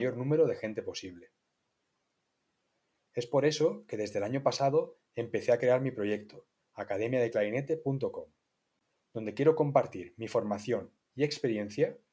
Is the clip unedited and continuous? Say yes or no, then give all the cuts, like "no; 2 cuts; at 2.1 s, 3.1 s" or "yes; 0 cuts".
no; 1 cut; at 6.6 s